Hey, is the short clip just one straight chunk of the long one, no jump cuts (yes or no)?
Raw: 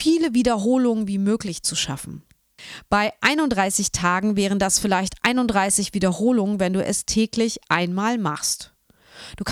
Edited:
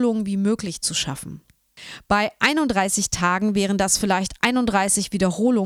yes